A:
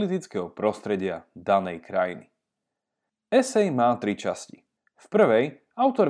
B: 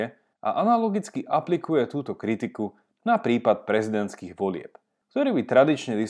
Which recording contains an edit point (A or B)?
B